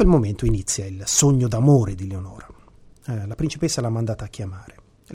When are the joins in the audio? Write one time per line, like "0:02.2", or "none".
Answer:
0:03.0